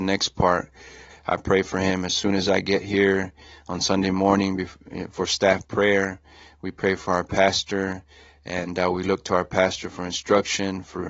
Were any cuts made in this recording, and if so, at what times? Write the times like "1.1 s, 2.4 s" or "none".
1.1 s